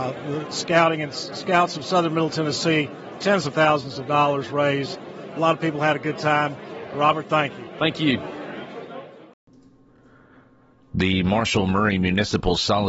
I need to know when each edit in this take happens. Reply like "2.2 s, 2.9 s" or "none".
none